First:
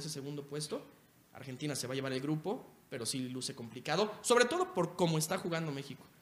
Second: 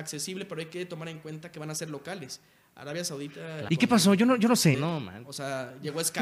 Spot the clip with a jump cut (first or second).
second